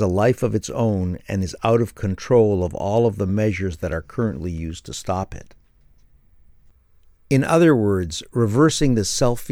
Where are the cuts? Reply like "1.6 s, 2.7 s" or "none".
none